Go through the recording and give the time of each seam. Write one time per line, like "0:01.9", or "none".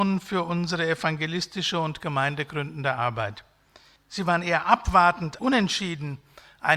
0:04.0
0:05.4